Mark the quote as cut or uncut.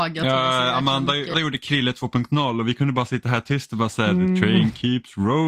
cut